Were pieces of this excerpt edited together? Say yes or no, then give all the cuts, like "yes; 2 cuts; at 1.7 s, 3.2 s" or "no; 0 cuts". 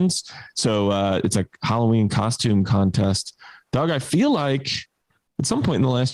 no; 0 cuts